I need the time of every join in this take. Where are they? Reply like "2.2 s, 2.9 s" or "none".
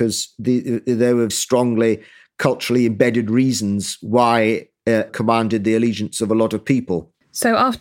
1.3 s, 5.1 s